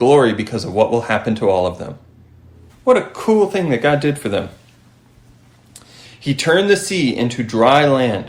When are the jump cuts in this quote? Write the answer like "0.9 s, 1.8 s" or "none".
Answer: 2.7 s, 6.0 s